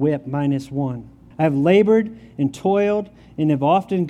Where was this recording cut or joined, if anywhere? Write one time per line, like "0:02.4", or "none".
0:01.3